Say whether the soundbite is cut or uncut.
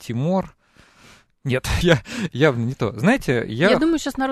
cut